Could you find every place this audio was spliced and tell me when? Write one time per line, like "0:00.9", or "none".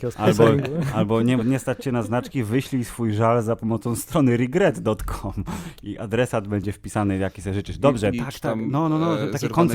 0:08.1

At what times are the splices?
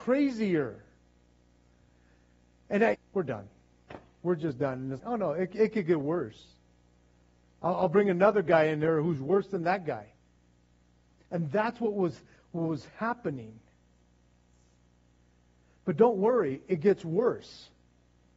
0:02.9
0:05.0

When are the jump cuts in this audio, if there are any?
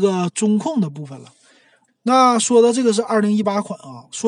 0:01.9

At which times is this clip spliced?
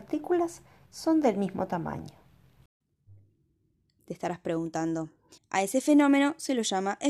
0:04.0
0:05.4

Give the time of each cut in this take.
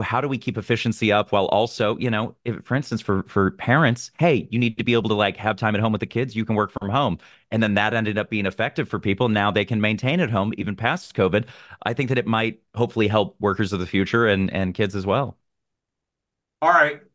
0:11.8

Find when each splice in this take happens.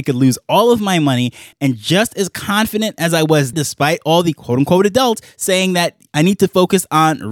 0:01.5
0:03.5

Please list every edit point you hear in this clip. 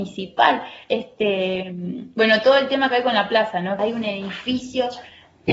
0:03.8

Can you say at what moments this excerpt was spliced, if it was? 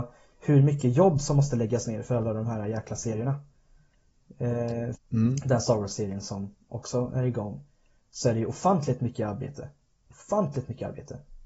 0:04.9

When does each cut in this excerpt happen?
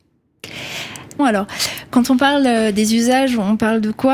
0:01.2

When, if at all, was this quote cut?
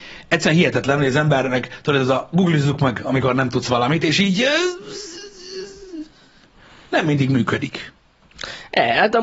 none

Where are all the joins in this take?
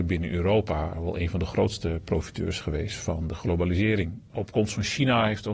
0:00.9

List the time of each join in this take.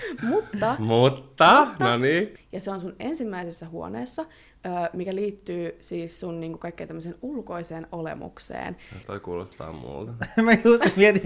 0:02.4
0:09.0

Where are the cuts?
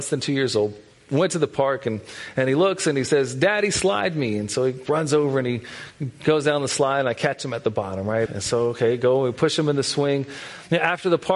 0:08.3

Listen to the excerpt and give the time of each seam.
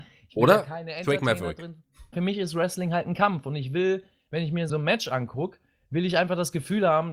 0:02.1
0:04.7

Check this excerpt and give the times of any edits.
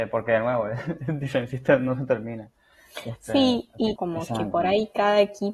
0:04.0

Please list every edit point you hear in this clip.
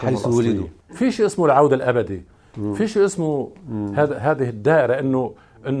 none

